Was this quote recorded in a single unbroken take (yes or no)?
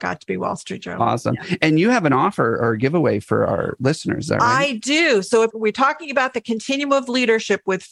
yes